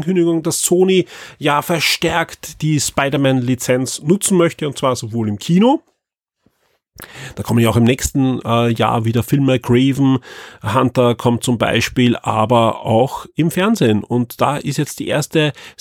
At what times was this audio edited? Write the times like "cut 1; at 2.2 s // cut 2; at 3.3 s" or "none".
none